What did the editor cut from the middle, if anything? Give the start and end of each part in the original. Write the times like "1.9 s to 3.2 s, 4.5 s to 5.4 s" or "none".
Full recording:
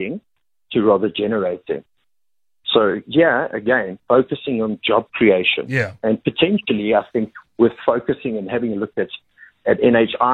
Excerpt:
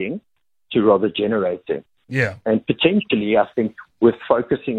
2.1 s to 5.7 s